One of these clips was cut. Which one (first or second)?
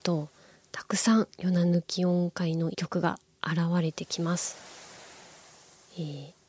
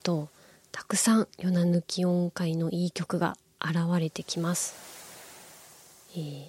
first